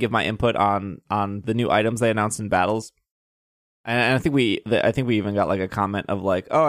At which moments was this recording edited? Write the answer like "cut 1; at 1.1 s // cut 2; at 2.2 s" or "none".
cut 1; at 1.4 s